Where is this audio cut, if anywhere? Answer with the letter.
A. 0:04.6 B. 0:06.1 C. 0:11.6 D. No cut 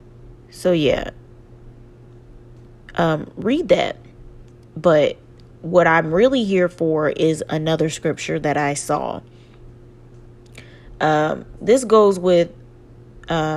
C